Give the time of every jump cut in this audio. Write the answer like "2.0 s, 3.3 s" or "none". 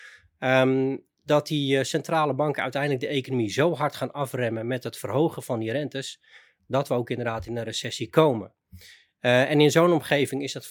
none